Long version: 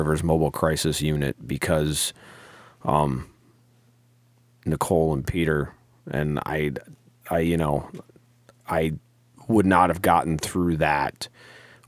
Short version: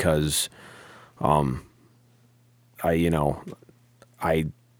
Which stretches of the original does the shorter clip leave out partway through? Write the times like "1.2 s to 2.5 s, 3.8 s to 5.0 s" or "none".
4.4 s to 7.2 s